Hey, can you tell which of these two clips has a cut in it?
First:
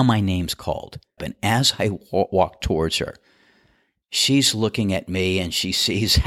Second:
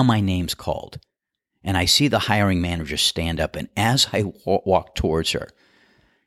first; 1 cut; at 1.2 s

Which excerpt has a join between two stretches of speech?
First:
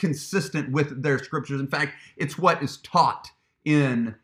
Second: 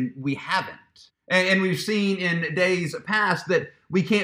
second; 1 cut; at 1.1 s

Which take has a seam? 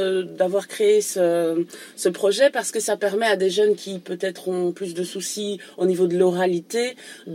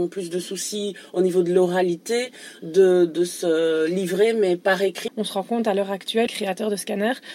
second; 2 cuts; at 5.1 s, 6.3 s

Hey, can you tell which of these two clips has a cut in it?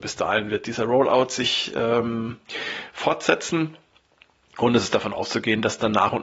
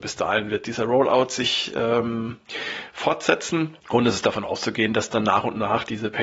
second; 1 cut; at 3.8 s

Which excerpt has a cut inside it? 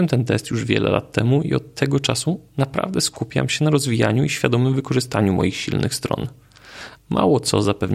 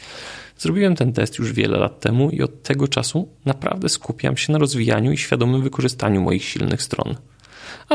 first; 1 cut; at 7.0 s

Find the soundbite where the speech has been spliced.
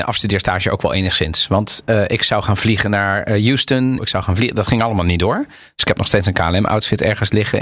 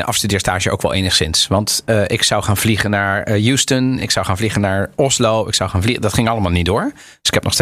first; 1 cut; at 4.0 s

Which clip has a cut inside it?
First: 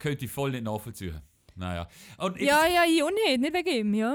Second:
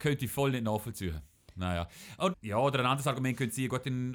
second; 1 cut; at 2.3 s

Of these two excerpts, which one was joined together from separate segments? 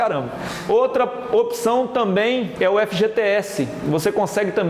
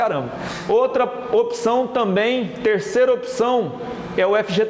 first; 1 cut; at 2.6 s

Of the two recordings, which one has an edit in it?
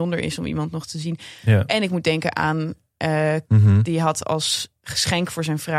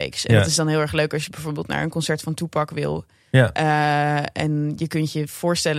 first; 1 cut; at 3.4 s

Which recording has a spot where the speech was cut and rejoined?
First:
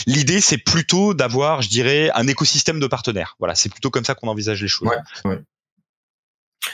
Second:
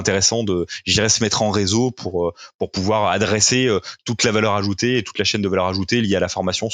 first; 1 cut; at 5.2 s

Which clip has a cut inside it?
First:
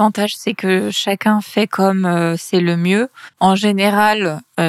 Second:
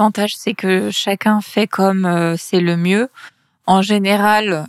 first; 1 cut; at 3.3 s

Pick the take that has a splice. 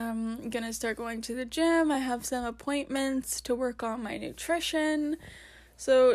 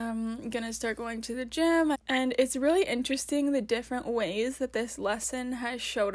second; 1 cut; at 1.9 s

